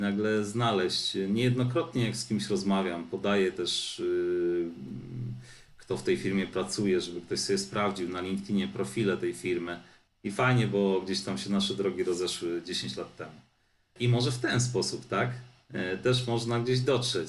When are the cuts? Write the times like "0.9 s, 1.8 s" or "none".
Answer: 10.1 s, 14.0 s